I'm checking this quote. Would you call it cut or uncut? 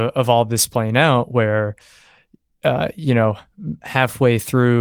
uncut